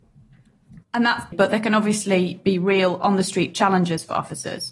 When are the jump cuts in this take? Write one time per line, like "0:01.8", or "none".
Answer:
0:01.3